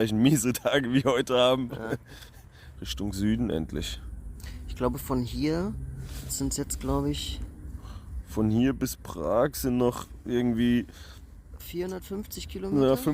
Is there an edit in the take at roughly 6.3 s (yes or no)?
yes